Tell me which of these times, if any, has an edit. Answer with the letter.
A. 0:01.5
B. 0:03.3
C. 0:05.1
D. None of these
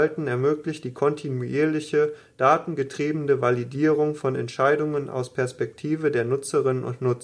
D